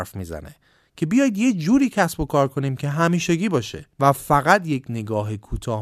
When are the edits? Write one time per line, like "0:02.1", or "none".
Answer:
0:03.9